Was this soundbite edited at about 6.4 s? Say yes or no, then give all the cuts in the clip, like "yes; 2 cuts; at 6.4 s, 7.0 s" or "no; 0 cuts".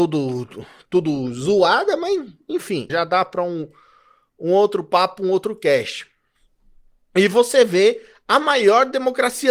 no; 1 cut; at 2.9 s